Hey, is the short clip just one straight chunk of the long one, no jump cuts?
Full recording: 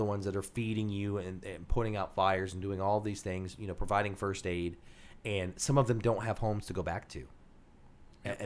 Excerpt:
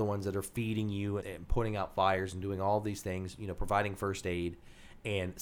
no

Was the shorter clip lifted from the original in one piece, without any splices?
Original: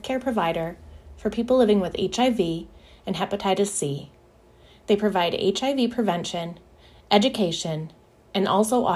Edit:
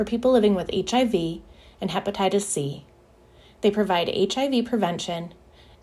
yes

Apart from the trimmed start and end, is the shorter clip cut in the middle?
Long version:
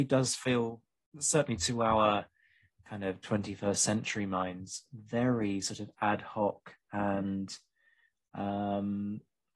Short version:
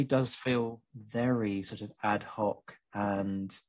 yes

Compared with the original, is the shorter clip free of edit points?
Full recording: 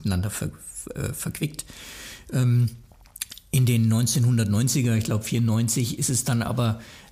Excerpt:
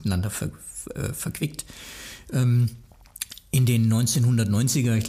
yes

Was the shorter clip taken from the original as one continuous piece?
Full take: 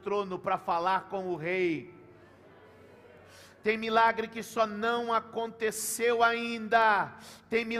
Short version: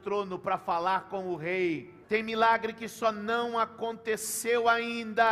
no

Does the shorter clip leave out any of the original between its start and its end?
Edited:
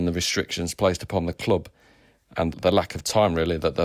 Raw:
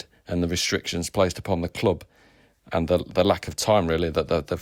yes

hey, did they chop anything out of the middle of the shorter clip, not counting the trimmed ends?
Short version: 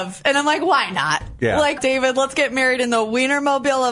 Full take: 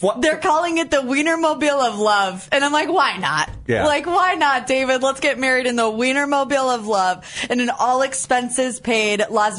yes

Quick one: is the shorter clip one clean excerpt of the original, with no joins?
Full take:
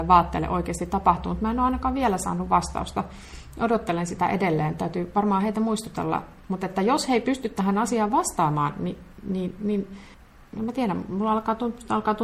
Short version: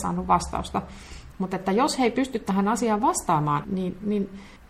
no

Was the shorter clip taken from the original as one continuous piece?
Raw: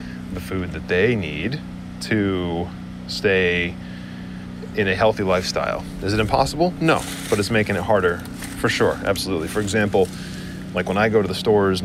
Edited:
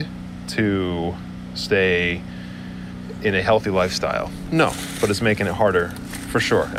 no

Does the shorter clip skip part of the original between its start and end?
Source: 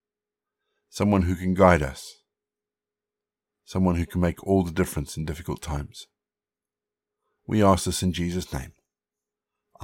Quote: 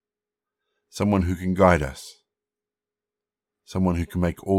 no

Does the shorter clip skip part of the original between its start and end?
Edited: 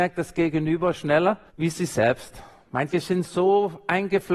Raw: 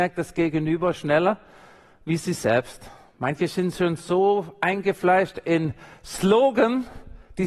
yes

